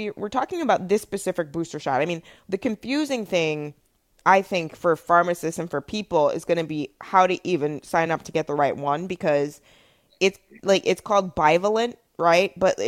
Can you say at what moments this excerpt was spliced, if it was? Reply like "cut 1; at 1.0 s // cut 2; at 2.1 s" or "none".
none